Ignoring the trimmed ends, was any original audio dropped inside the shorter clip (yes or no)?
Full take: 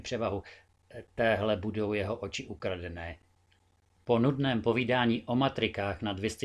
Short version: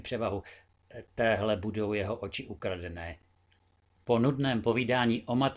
no